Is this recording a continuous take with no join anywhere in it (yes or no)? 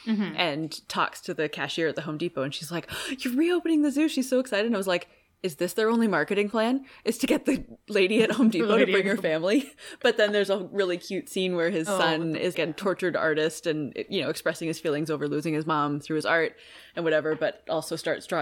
no